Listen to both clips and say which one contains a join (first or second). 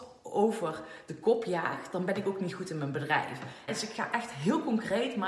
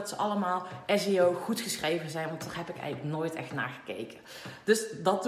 first